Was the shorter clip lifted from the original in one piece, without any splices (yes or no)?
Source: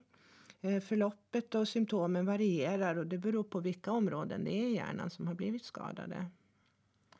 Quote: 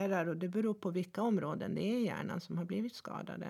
yes